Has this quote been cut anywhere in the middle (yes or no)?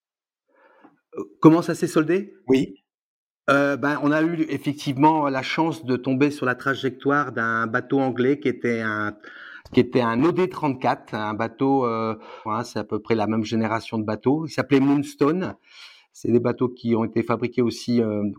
yes